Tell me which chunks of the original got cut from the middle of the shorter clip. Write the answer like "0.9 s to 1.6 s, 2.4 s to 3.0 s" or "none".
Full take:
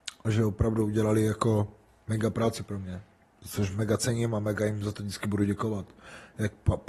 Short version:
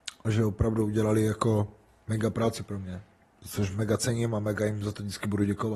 none